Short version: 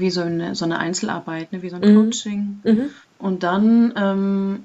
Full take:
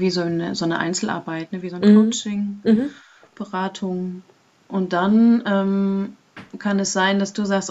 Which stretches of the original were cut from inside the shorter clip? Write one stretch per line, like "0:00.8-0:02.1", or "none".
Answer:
0:03.0-0:04.5